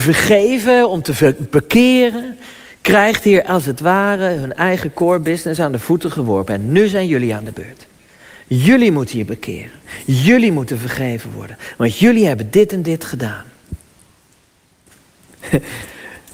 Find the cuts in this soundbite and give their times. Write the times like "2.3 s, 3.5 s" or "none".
none